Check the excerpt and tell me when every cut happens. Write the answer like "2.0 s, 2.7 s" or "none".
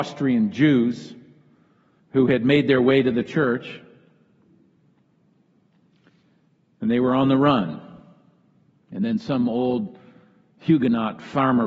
none